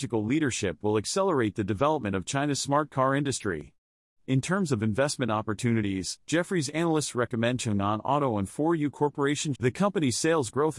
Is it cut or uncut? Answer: cut